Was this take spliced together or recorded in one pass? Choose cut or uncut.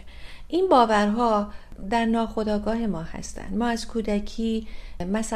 uncut